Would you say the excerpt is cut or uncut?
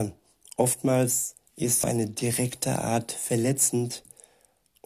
cut